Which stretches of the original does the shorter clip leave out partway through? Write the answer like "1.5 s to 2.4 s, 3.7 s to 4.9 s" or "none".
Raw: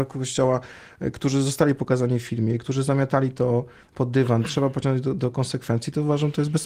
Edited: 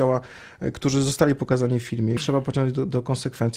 2.6 s to 4.4 s